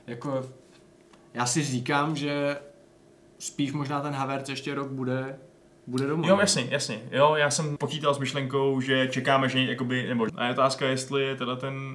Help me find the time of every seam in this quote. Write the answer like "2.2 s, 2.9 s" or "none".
7.8 s, 10.3 s